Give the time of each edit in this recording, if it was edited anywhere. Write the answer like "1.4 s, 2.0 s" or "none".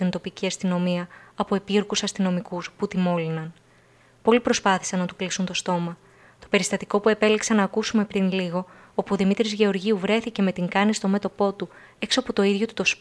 none